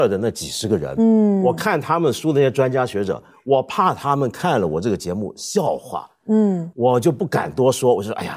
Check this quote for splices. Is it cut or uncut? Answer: uncut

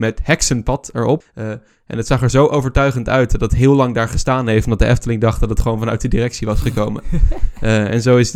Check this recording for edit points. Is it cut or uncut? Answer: cut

